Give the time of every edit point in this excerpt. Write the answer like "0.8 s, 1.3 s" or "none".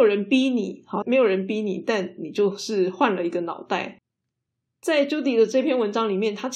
1.0 s, 4.7 s